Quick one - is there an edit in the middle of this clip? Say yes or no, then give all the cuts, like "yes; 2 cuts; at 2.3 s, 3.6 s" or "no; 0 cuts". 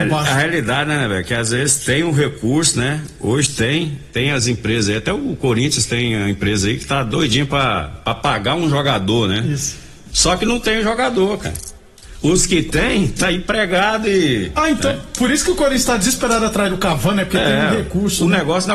no; 0 cuts